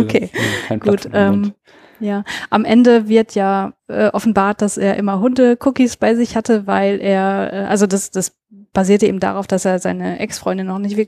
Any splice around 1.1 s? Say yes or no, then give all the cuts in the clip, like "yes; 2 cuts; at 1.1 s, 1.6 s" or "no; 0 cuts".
no; 1 cut; at 3.8 s